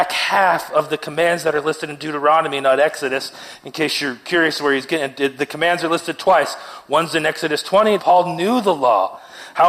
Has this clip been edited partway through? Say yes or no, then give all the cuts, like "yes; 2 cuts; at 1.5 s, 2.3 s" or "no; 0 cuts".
yes; 1 cut; at 8.0 s